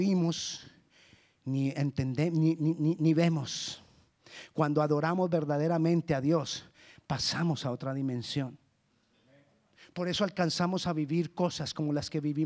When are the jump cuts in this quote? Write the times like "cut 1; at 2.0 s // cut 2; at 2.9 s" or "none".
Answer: none